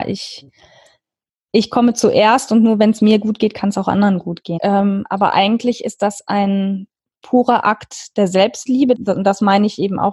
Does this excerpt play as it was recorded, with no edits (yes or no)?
no